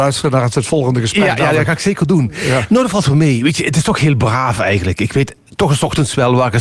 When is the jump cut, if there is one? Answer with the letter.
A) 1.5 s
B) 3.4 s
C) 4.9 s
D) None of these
D